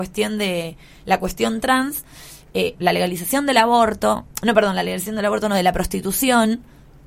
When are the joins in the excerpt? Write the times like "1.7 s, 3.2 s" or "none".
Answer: 2.8 s

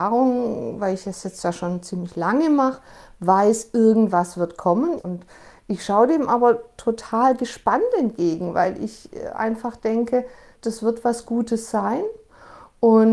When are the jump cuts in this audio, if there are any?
5.0 s, 10.5 s

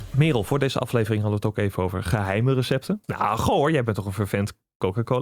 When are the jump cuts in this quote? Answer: 3.0 s

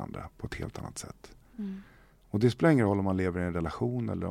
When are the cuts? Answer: none

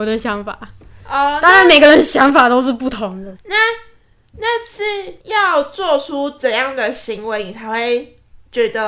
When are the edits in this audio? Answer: 3.3 s, 5.2 s

